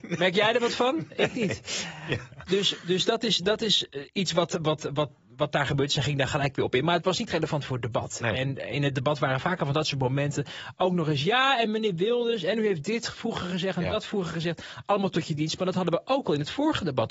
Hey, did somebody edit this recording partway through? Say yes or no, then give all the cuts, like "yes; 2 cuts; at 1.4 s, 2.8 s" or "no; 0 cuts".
no; 0 cuts